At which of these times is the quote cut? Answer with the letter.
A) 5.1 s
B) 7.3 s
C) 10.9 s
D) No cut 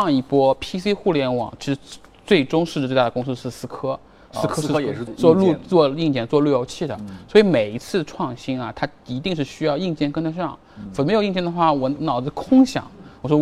A